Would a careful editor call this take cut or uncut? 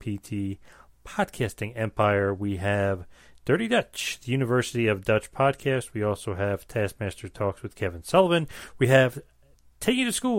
uncut